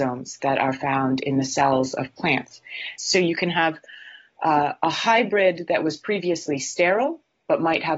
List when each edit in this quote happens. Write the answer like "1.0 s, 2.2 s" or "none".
3.0 s